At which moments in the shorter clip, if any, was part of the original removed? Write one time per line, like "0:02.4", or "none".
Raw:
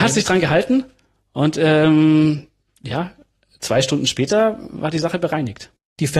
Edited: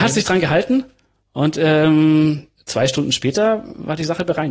0:02.6